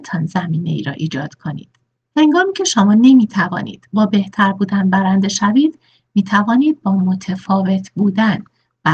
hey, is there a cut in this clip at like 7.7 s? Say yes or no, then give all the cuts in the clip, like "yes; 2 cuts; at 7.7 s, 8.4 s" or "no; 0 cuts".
no; 1 cut; at 2.1 s